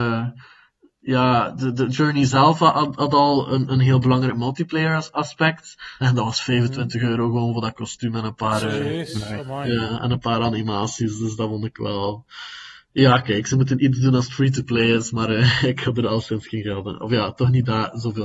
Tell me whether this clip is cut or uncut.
cut